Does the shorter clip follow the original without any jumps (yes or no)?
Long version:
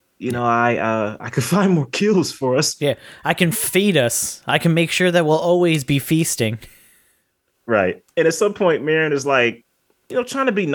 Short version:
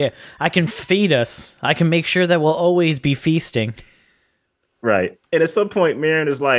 yes